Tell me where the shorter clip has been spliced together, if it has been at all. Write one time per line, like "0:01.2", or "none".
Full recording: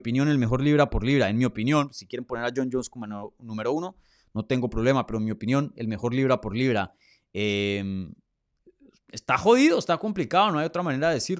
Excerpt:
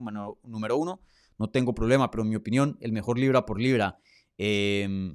none